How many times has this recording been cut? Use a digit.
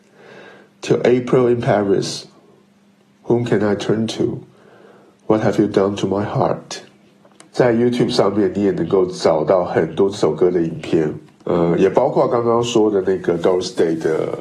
1